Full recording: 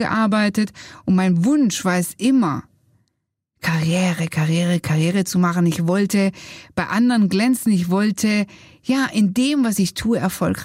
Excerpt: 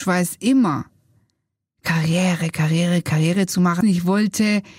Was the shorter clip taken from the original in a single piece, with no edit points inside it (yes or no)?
no